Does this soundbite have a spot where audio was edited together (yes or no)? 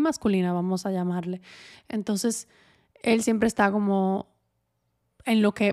no